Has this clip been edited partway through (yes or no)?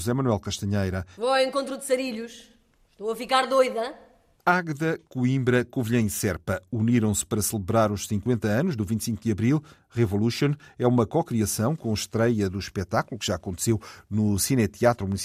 yes